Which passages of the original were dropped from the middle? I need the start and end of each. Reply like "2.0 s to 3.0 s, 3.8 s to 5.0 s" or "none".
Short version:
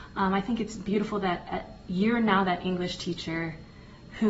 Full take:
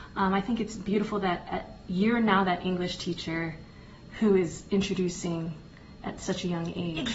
none